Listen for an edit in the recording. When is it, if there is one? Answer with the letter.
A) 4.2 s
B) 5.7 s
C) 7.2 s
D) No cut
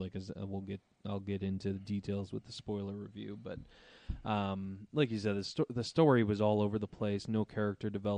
D